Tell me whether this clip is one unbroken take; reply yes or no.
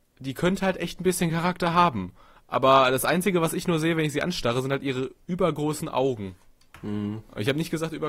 yes